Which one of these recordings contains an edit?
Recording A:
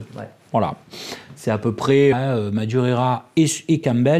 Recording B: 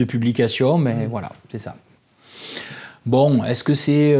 A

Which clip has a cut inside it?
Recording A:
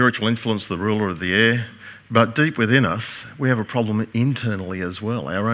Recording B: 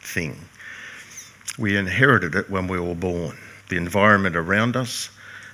B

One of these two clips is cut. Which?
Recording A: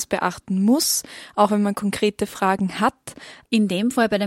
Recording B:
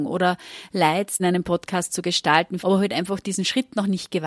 B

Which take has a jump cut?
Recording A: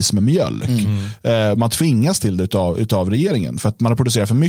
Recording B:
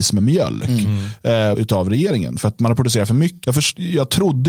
B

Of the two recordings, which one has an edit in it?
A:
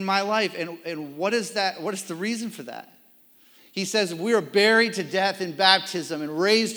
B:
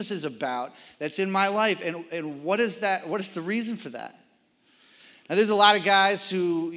A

